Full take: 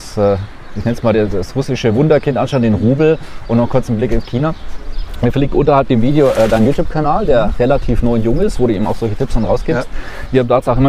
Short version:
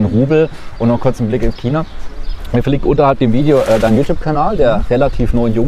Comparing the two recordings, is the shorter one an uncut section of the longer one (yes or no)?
yes